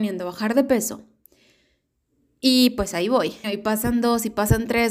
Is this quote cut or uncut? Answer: cut